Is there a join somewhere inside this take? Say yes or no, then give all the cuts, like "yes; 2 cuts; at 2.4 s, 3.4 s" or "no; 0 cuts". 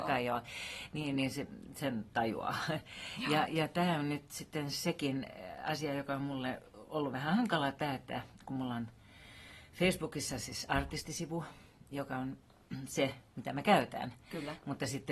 no; 0 cuts